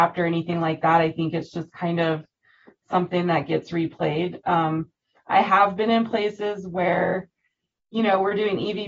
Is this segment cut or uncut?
uncut